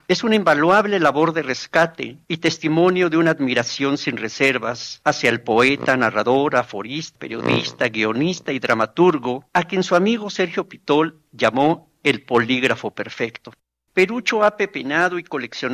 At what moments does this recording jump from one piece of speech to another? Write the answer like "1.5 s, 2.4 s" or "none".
7.2 s, 13.9 s

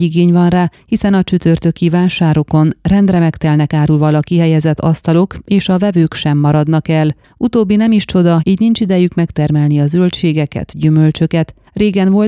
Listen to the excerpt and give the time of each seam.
8.4 s

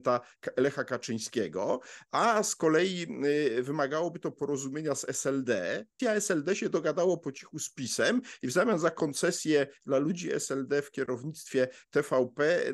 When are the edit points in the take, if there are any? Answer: 6.0 s

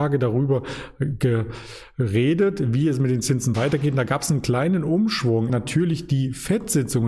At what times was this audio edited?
5.5 s

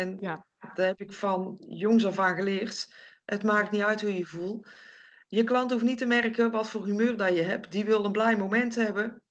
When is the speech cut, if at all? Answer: none

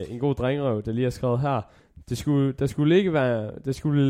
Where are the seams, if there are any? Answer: none

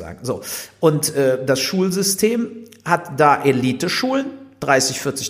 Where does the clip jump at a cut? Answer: none

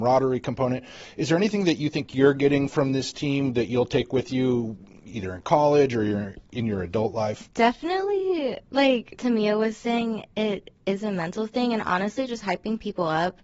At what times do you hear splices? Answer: none

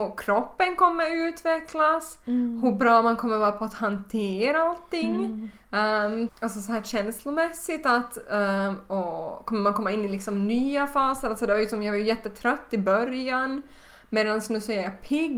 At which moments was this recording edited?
6.3 s

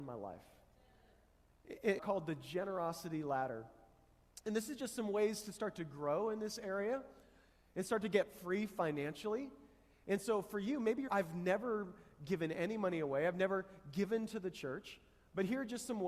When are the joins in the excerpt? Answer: 2.0 s, 11.1 s

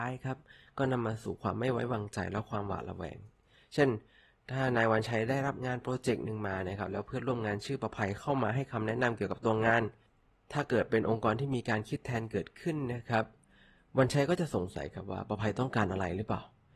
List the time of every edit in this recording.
none

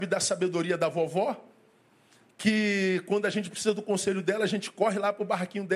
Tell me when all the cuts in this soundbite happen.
none

